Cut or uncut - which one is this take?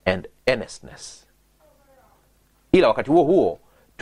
uncut